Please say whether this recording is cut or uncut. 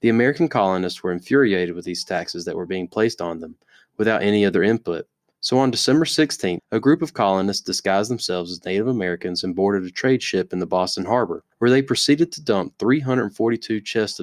cut